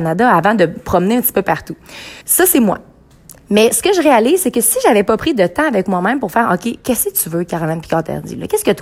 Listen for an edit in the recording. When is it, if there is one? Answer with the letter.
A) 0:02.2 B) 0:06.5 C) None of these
A